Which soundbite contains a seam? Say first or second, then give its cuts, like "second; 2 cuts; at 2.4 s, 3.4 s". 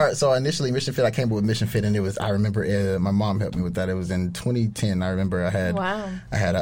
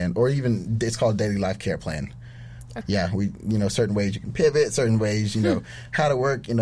second; 1 cut; at 2.8 s